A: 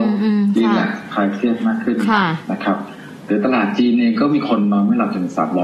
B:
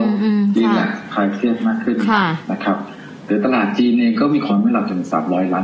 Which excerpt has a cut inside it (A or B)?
B